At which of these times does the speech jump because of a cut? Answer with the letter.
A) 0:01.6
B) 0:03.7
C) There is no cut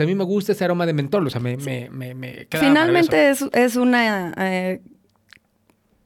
C